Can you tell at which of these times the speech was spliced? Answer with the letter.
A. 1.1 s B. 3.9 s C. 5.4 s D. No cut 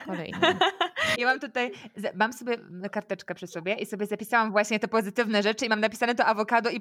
A